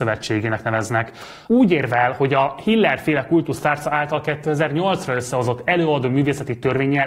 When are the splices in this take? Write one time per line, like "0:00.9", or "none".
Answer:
0:01.4